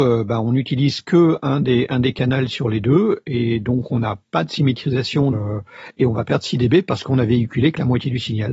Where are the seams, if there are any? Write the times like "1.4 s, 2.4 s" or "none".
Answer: 5.3 s